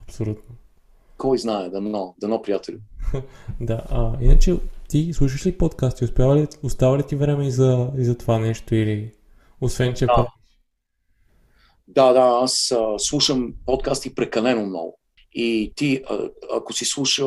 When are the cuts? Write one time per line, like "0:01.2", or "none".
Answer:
0:15.2